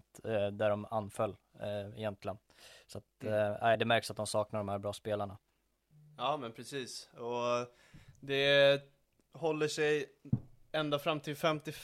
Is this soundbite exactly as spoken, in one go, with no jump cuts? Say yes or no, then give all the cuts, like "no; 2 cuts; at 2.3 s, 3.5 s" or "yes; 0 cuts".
yes; 0 cuts